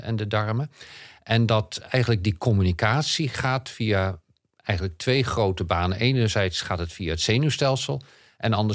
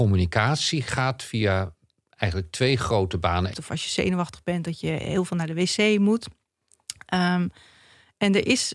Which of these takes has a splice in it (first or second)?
second